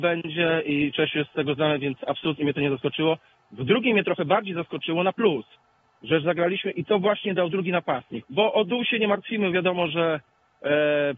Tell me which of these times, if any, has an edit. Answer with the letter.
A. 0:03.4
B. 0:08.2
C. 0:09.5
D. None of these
B